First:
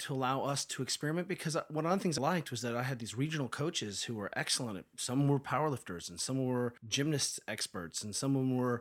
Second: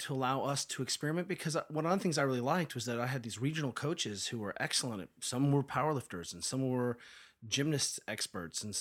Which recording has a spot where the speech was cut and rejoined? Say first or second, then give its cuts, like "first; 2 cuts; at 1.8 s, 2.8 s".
first; 2 cuts; at 2.2 s, 6.8 s